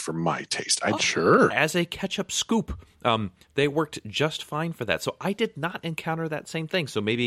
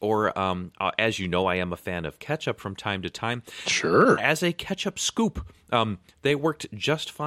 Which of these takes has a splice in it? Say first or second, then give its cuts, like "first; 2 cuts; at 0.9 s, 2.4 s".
first; 1 cut; at 1.0 s